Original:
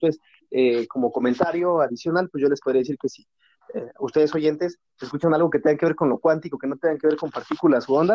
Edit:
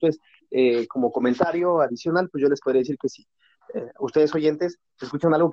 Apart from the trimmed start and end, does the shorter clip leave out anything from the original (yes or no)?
no